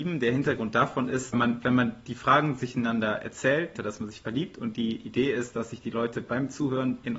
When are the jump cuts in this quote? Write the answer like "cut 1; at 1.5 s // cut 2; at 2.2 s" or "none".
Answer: cut 1; at 1.3 s // cut 2; at 3.7 s